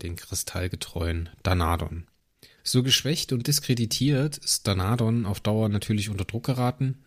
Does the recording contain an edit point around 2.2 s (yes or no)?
no